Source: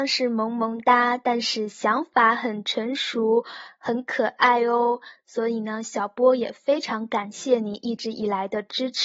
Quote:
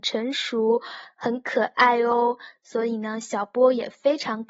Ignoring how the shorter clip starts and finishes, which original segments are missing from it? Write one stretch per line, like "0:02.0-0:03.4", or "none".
none